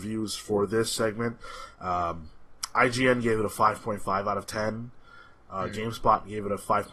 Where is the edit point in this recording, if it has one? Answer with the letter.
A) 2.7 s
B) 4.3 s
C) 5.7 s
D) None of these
A